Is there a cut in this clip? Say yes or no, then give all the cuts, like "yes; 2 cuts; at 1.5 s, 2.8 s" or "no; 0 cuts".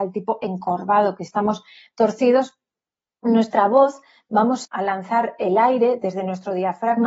yes; 1 cut; at 4.6 s